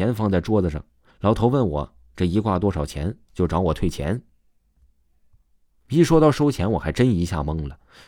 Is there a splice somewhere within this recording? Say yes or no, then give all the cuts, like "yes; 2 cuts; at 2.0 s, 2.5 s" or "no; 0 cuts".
yes; 2 cuts; at 1.1 s, 3.3 s